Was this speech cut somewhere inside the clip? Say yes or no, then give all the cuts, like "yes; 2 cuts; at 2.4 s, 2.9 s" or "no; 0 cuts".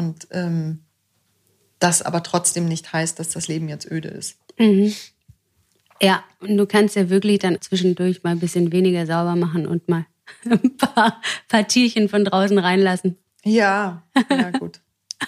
yes; 1 cut; at 7.6 s